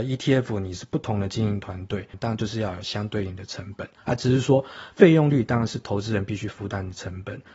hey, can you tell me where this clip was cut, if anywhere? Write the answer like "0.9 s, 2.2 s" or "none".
2.1 s, 4.0 s